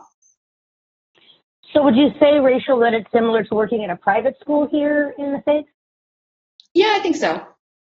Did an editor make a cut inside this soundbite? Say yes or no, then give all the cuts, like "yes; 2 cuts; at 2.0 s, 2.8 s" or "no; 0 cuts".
no; 0 cuts